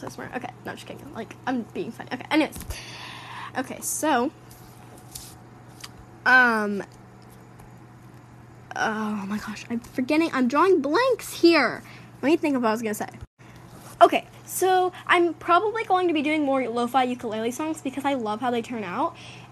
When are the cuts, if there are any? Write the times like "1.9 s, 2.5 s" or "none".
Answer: 3.5 s